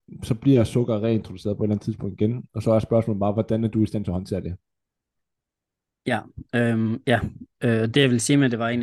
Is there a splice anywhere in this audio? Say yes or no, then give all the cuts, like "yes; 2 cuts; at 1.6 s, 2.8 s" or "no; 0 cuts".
no; 0 cuts